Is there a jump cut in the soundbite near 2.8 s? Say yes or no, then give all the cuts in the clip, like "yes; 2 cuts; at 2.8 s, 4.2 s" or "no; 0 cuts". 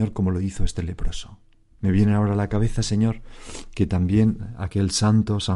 no; 1 cut; at 1.6 s